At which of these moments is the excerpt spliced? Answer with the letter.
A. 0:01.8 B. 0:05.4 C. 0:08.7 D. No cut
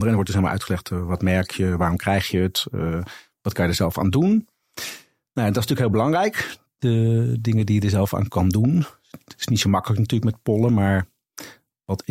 D